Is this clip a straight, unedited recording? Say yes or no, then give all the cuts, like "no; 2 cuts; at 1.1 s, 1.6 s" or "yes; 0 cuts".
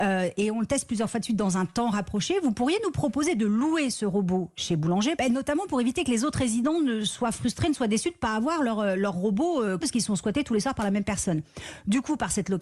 no; 2 cuts; at 5.2 s, 9.8 s